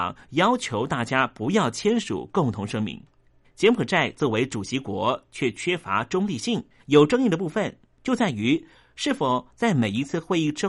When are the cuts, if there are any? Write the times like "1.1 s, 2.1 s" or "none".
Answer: 3.4 s, 6.8 s